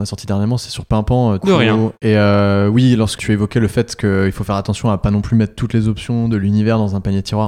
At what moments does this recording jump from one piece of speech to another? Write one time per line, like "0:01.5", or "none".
0:01.4
0:03.2